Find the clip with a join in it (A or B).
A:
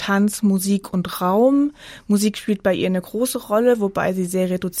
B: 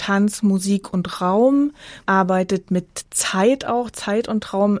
B